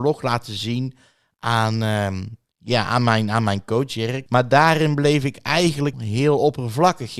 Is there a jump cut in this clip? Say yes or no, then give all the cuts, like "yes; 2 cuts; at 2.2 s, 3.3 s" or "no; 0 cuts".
yes; 2 cuts; at 4.3 s, 5.9 s